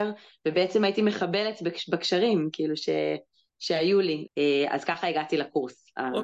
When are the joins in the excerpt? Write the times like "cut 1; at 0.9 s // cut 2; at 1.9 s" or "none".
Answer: cut 1; at 4.3 s